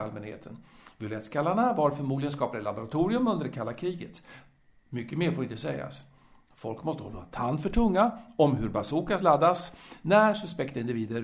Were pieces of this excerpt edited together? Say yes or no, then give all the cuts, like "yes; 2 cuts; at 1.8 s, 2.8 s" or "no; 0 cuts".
no; 0 cuts